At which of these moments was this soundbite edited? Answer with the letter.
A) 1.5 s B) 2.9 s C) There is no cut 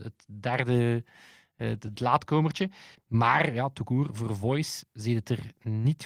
B